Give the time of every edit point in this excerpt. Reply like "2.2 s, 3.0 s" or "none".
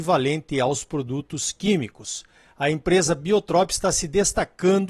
none